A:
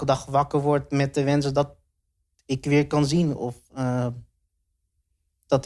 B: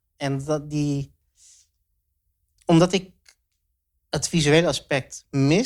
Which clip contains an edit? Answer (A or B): A